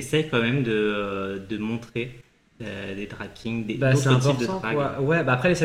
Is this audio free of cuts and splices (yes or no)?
yes